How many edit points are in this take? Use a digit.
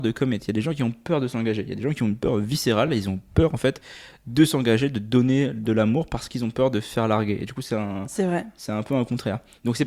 0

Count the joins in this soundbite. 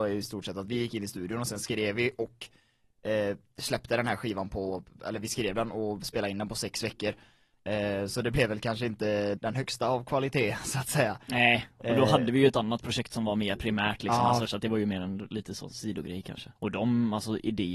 3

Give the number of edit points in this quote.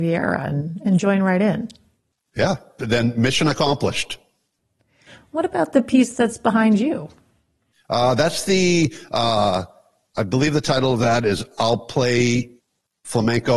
0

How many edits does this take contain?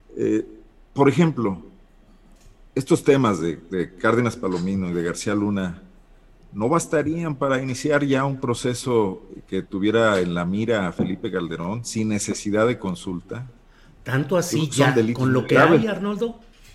0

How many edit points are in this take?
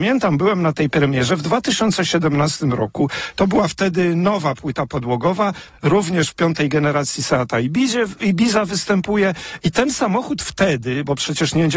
0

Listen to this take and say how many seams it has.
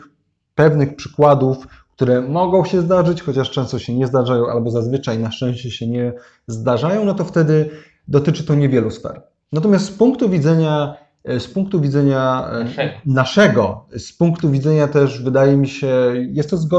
0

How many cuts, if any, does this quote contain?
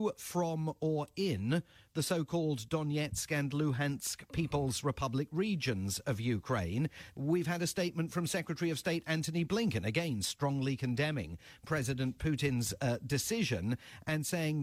1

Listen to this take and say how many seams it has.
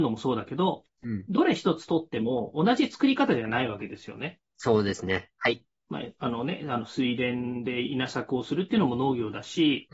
1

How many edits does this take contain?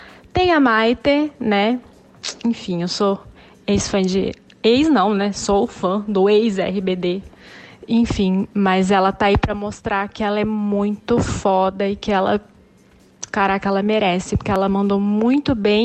0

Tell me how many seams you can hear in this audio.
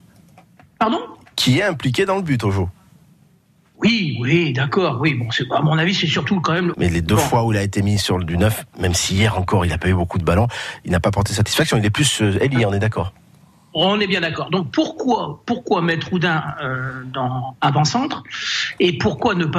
1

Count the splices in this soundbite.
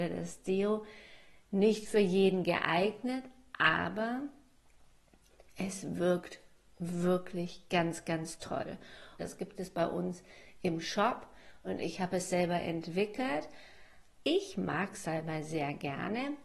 2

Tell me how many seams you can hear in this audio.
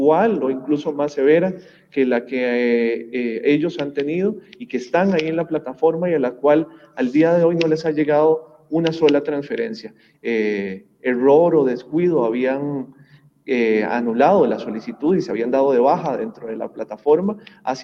1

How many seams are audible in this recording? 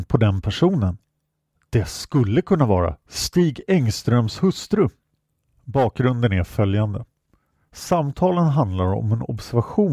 0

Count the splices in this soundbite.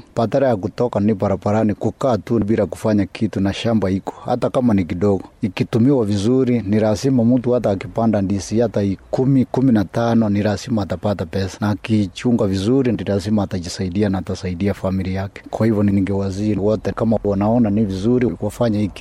0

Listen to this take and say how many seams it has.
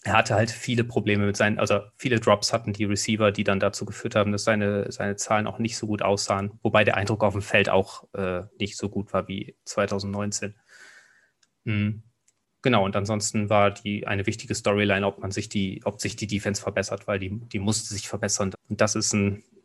2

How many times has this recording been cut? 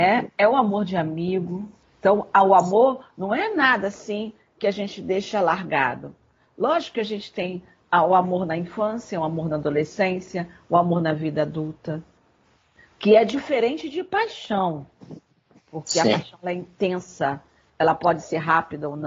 1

